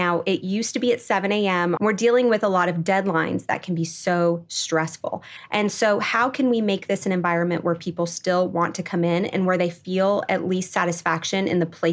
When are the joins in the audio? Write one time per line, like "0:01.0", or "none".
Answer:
0:01.8